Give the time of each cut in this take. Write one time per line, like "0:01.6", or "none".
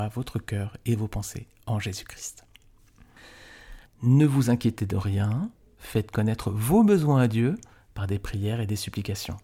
0:03.8
0:05.8

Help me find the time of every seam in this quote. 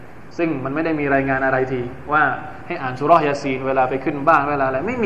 none

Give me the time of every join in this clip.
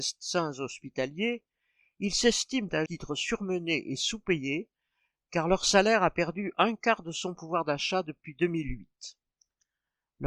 0:02.9

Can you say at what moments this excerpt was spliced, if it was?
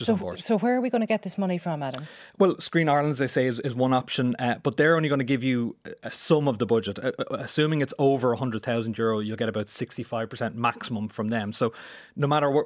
none

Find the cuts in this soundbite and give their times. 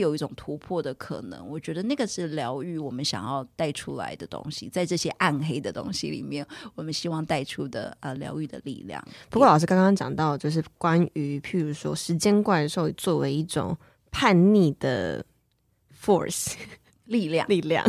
none

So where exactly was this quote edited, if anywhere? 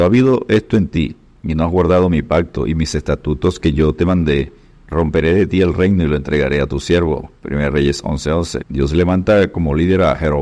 0:08.6

